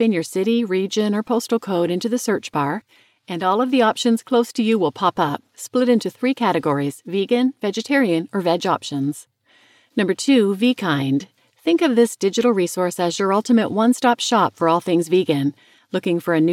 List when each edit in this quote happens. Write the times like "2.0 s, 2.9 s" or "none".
none